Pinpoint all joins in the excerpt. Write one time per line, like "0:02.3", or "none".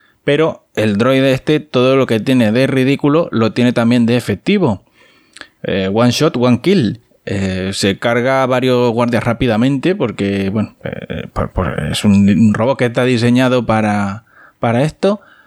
none